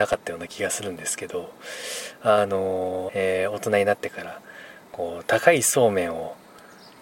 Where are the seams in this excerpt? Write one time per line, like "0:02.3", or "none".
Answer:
0:03.1